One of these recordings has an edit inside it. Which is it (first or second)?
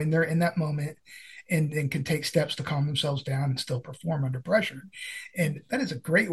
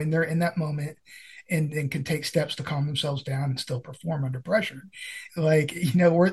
second